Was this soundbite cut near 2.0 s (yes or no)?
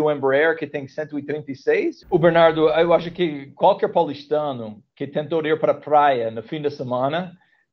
yes